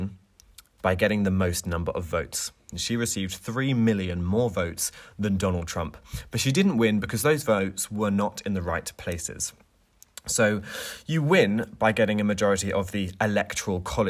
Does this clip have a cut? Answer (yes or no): yes